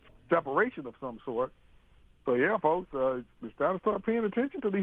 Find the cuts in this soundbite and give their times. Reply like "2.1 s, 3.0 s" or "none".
none